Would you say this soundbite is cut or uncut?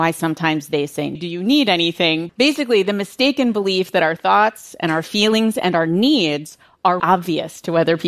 cut